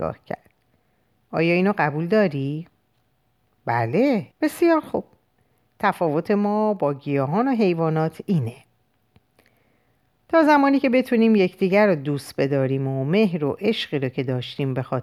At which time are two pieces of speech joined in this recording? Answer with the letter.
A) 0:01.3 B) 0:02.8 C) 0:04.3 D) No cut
C